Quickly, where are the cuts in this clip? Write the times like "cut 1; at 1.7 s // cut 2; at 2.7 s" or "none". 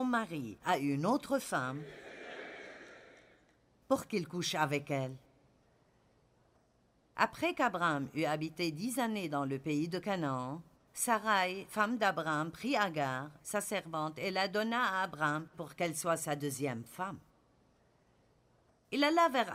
cut 1; at 13.4 s // cut 2; at 15.5 s